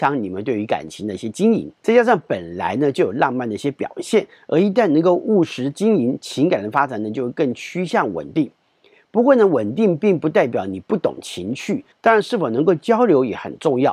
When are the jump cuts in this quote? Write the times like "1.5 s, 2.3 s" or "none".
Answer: 1.8 s, 11.9 s